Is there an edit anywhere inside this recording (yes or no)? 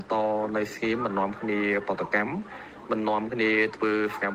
no